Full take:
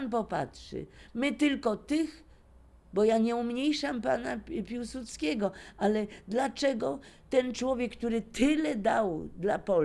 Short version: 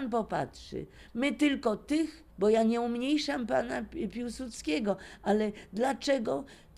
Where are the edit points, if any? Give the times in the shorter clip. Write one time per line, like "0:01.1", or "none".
0:02.3